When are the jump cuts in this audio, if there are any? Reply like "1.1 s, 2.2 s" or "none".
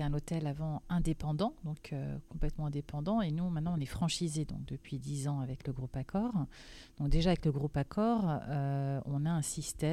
none